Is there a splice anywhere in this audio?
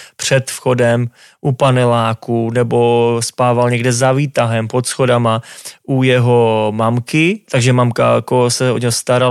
yes; 1 cut; at 7.4 s

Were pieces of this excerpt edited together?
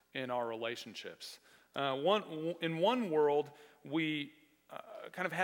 no; 0 cuts

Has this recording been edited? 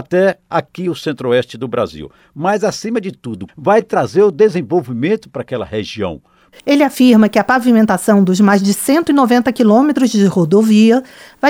yes; 2 cuts; at 3.5 s, 6.5 s

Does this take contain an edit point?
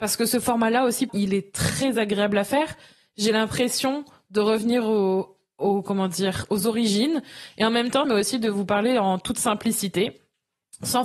yes; 2 cuts; at 1.1 s, 8.0 s

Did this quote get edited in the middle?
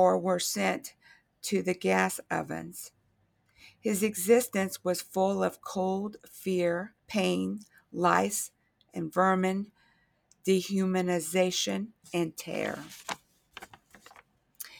yes; 2 cuts; at 7.0 s, 12.0 s

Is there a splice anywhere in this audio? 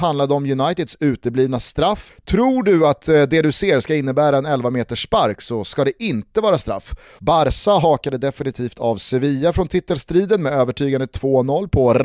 yes; 2 cuts; at 2.1 s, 7.2 s

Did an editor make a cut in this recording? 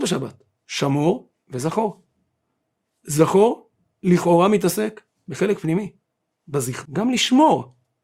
yes; 1 cut; at 6.9 s

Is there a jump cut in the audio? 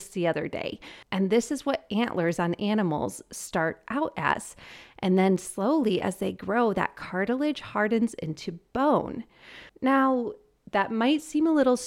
yes; 2 cuts; at 1.0 s, 9.7 s

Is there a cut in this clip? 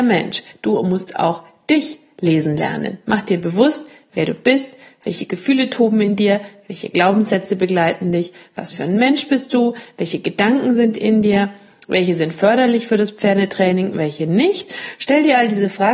no; 0 cuts

